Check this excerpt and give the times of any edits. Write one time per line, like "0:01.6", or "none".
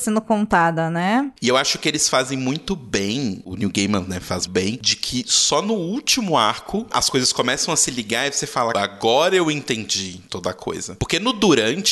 0:04.5
0:08.7